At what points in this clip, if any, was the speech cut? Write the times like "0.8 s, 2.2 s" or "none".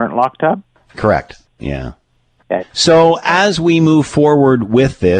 1.4 s, 2.6 s